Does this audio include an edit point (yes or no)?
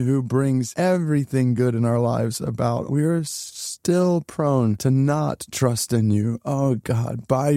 yes